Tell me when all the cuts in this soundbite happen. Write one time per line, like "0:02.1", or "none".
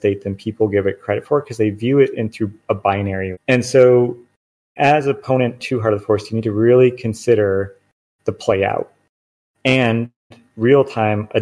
0:03.3